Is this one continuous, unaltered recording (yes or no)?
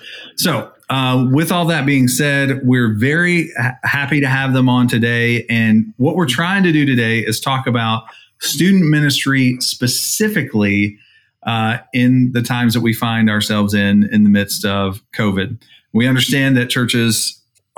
yes